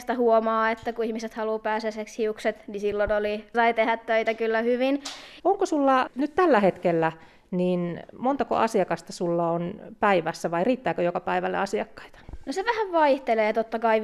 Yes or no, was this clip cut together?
yes